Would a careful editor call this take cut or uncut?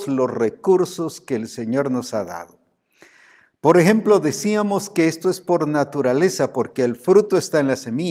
uncut